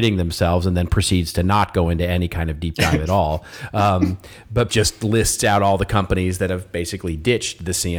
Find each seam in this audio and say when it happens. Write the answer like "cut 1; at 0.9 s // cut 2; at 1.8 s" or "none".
cut 1; at 4.7 s